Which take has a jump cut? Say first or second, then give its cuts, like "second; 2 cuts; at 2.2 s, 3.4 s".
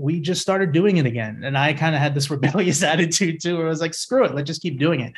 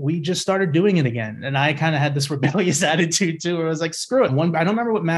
second; 1 cut; at 4.3 s